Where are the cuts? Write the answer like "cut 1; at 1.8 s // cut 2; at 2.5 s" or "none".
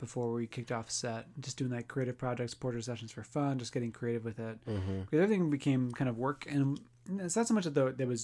none